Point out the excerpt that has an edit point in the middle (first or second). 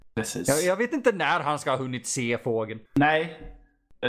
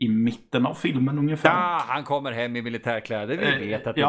first